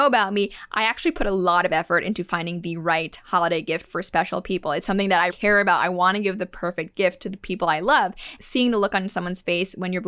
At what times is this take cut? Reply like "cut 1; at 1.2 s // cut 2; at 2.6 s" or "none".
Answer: cut 1; at 5.3 s // cut 2; at 8.4 s